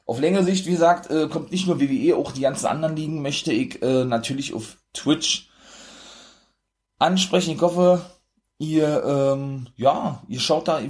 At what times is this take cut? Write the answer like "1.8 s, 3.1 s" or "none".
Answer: none

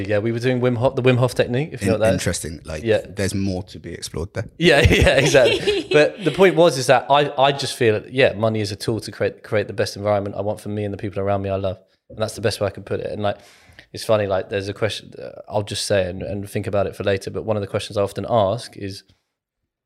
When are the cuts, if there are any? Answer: none

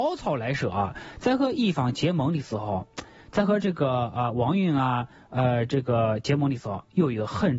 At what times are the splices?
none

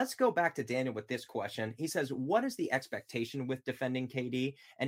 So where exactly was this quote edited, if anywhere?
none

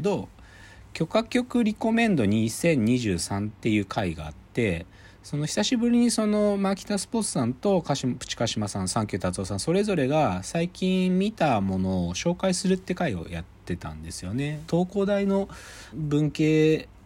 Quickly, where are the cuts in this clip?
14.7 s, 15.9 s

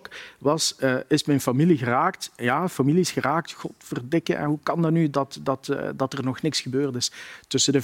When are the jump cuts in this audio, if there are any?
none

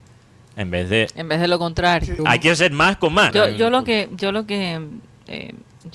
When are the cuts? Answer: 2.2 s, 3.3 s

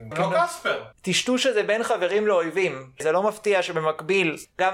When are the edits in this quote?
0.9 s

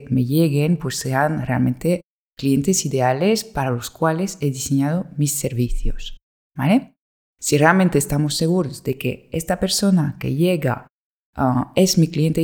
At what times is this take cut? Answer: none

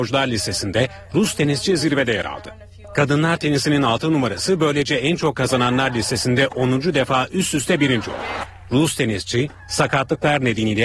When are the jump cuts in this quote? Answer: none

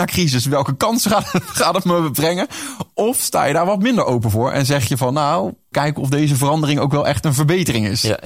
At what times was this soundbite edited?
5.7 s

